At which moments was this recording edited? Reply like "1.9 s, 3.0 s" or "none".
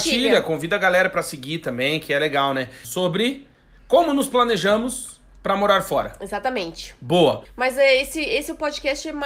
2.8 s, 7.4 s